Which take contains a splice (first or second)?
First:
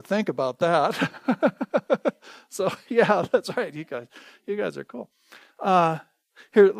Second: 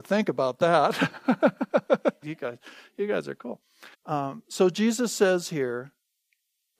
second